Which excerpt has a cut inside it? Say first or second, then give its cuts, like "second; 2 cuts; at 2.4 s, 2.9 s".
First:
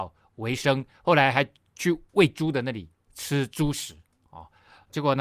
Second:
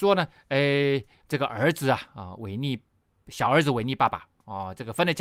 second; 1 cut; at 1.2 s